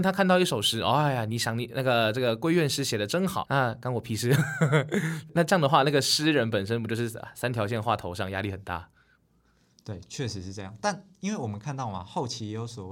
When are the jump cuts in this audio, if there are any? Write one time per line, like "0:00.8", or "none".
0:03.4